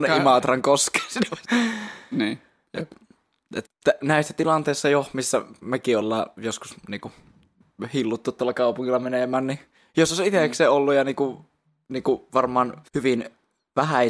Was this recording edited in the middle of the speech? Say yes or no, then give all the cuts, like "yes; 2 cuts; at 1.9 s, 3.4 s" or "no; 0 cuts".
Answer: yes; 3 cuts; at 1.4 s, 3.7 s, 12.9 s